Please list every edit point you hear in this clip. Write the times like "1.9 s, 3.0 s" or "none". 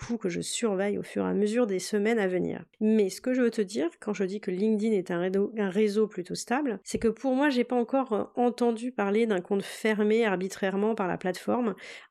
none